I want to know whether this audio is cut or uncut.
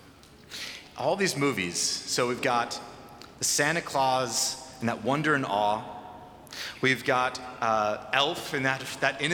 uncut